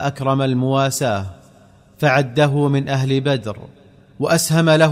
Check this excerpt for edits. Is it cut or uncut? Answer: uncut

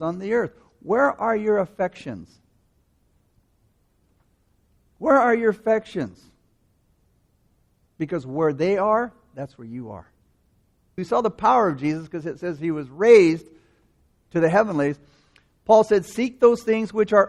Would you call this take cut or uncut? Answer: cut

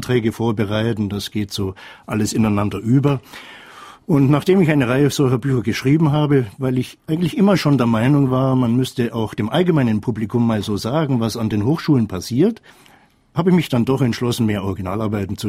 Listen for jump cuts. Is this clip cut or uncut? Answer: uncut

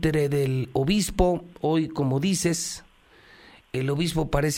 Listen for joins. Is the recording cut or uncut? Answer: uncut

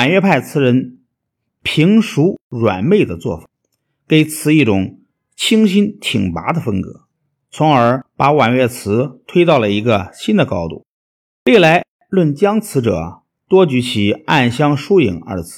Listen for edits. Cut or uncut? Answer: uncut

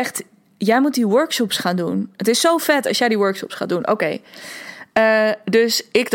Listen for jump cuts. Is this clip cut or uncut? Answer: uncut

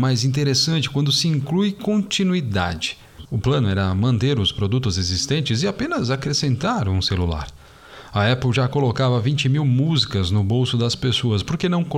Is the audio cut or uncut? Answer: cut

